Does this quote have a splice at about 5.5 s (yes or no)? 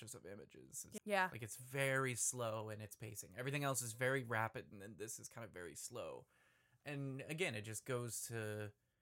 no